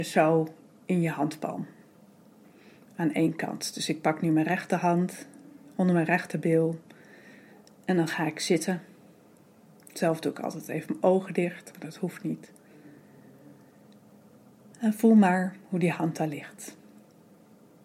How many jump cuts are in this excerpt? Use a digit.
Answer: 0